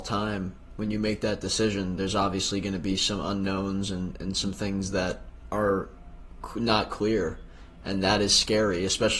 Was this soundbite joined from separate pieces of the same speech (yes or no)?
no